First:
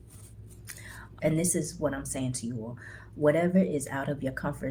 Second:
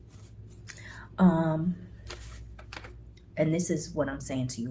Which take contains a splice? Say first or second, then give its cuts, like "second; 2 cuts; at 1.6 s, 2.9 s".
first; 1 cut; at 1.2 s